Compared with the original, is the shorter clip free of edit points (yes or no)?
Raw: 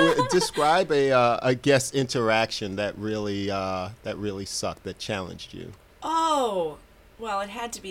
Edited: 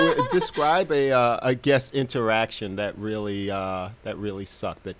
yes